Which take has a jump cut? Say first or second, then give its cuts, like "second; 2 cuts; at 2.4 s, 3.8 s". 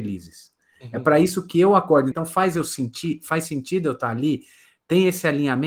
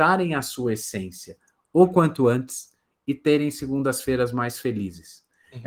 first; 1 cut; at 2.1 s